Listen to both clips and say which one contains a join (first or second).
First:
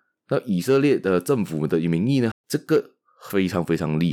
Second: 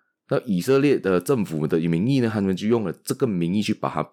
first